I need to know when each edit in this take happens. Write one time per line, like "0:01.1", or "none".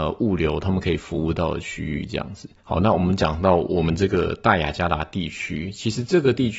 0:02.6